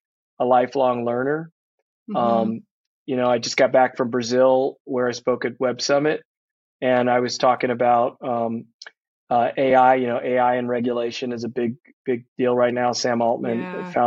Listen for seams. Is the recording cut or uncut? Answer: uncut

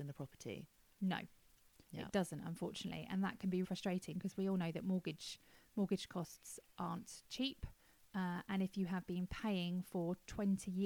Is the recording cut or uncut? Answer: cut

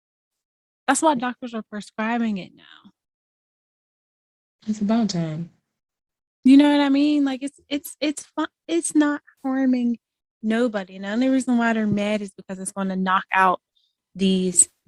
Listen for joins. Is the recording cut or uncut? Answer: uncut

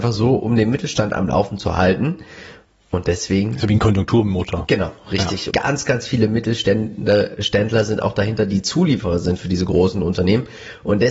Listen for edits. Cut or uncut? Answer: cut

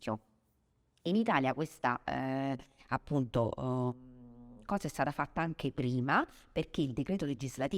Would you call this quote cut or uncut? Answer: uncut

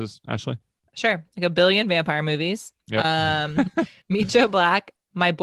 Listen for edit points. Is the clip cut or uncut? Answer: uncut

